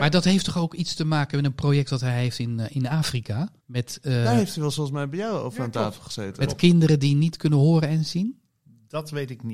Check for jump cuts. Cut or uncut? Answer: cut